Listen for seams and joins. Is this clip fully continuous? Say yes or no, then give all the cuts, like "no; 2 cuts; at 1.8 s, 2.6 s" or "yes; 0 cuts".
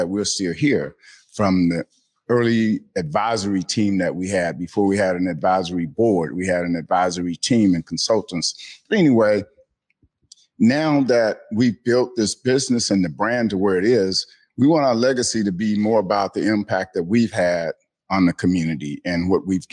yes; 0 cuts